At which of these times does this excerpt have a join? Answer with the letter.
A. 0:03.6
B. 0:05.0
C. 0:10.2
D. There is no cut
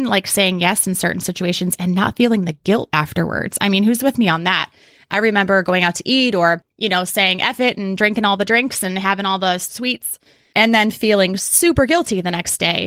D